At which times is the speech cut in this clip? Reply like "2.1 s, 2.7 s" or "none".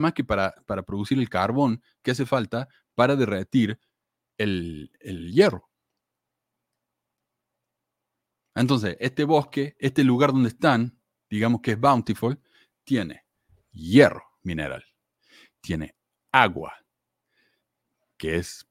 none